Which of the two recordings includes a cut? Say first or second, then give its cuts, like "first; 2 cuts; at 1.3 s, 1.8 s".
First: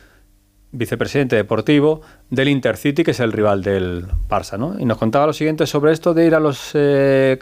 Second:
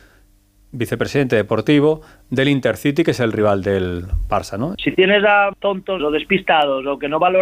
second; 2 cuts; at 4.7 s, 6.0 s